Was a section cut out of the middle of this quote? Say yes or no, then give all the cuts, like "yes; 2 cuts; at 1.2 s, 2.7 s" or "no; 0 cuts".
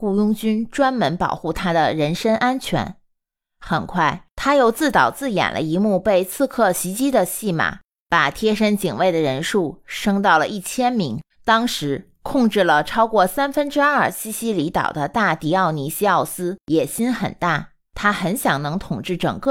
yes; 1 cut; at 11.3 s